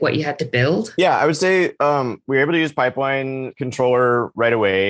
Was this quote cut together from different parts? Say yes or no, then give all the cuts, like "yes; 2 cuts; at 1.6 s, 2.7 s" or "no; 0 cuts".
no; 0 cuts